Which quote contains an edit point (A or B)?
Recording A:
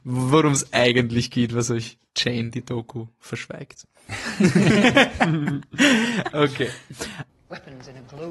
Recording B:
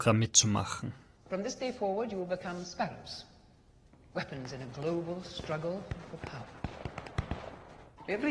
A